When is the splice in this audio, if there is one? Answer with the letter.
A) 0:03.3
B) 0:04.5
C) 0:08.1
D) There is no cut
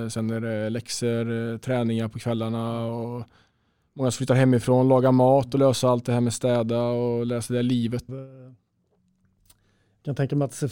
C